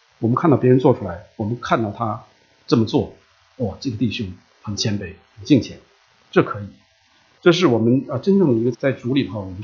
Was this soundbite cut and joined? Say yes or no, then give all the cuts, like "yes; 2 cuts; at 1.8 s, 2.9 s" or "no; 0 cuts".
yes; 2 cuts; at 7.4 s, 8.7 s